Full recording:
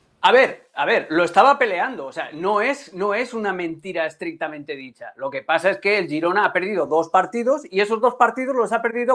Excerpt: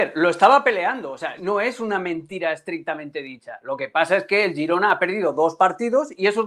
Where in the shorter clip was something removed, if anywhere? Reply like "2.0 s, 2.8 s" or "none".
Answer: 1.4 s